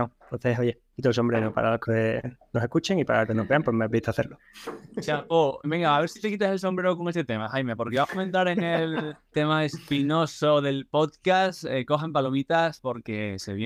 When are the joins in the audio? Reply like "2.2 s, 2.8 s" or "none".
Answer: 5.6 s